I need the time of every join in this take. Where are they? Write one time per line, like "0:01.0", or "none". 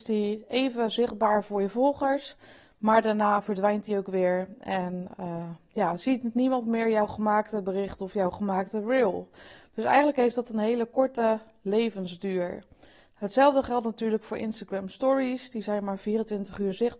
none